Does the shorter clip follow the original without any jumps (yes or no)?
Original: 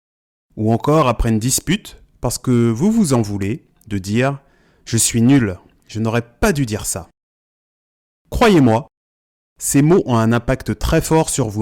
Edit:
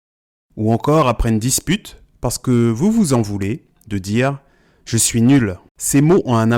no